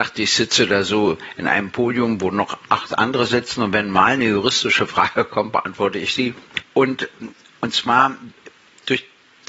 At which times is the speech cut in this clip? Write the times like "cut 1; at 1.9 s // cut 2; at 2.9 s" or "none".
cut 1; at 6.6 s

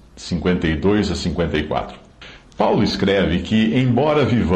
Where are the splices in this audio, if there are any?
none

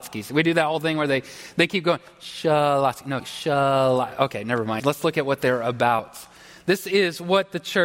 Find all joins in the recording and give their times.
cut 1; at 3.2 s // cut 2; at 4.8 s

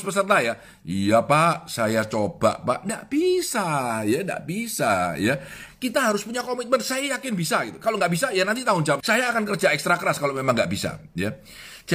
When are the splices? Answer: cut 1; at 9.0 s

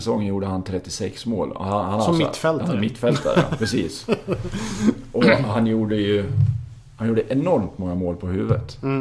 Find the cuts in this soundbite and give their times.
none

